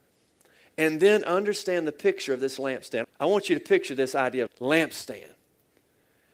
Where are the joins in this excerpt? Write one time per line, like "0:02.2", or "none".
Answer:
0:03.0
0:04.5